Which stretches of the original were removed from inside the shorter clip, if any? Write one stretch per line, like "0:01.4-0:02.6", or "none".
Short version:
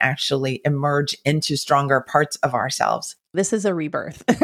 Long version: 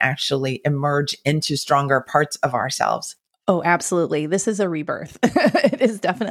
0:03.3-0:04.3